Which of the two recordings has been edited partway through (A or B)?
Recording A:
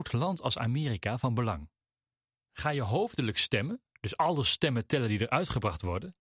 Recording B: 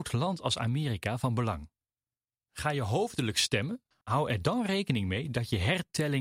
B